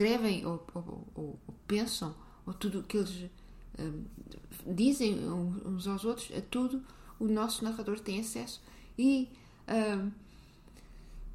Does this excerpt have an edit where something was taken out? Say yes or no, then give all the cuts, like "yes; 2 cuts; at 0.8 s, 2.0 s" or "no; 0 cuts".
no; 0 cuts